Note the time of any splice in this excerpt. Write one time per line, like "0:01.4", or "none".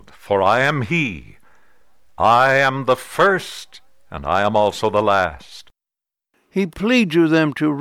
none